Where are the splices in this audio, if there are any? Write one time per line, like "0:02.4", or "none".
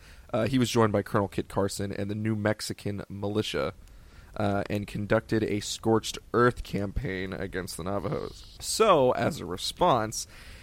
0:08.6